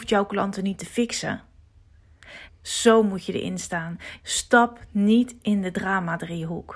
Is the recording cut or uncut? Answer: cut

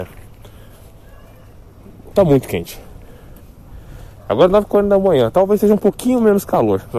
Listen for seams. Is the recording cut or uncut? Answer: cut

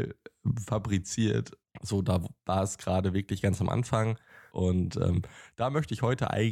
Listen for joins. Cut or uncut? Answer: cut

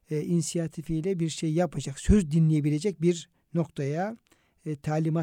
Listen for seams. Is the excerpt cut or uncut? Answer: uncut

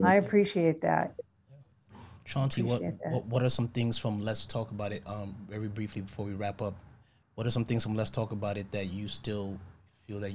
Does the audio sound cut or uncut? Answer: uncut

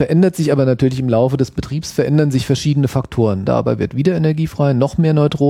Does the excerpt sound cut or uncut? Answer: cut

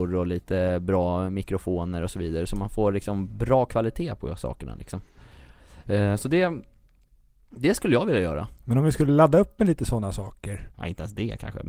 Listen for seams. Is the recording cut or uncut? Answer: cut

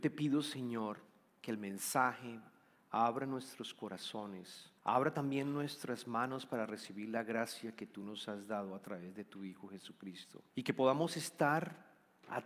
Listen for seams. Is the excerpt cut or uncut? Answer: cut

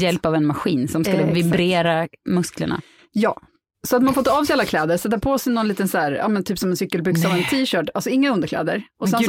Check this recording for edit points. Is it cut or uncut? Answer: uncut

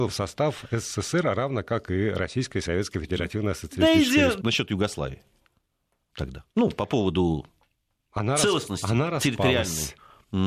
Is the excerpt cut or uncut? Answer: cut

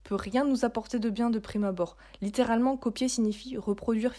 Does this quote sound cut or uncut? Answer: uncut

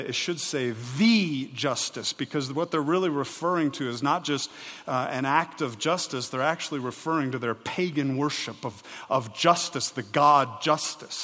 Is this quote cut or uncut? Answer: uncut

